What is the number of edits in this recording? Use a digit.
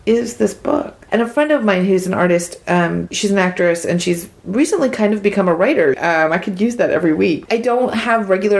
3